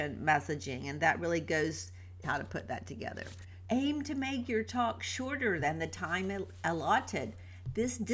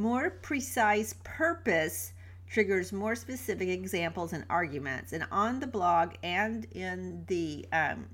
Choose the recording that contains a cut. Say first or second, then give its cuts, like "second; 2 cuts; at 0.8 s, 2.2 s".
first; 2 cuts; at 2.2 s, 3.6 s